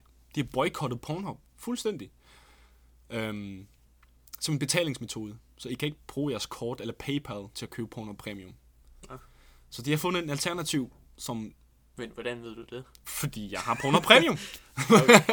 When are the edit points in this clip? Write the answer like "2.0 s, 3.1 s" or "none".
none

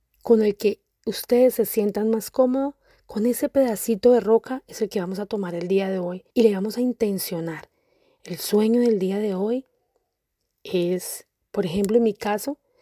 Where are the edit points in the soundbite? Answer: 6.3 s

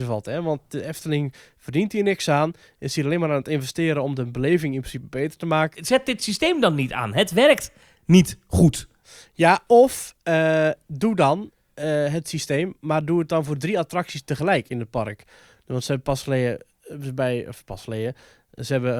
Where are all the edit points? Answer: 5.7 s

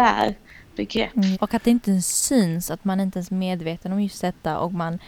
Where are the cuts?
1.3 s

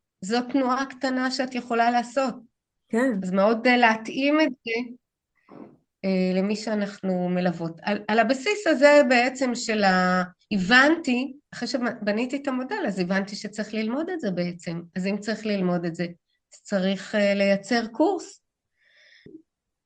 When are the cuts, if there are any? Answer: none

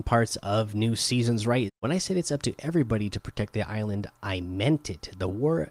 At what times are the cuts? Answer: 1.7 s

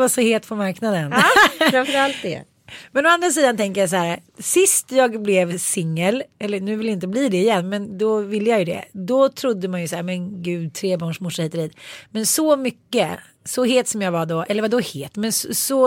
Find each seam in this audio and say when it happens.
4.3 s

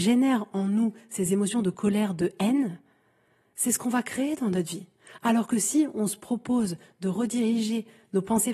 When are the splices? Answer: none

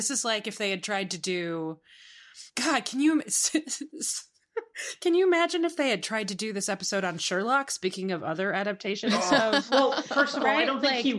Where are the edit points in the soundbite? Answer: none

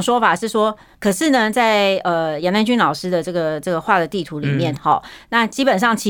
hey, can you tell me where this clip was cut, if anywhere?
0.9 s, 4.8 s

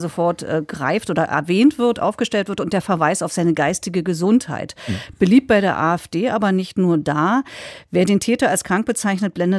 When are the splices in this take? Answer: none

